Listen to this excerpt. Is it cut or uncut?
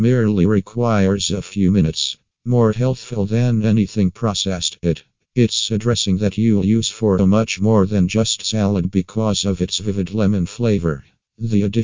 cut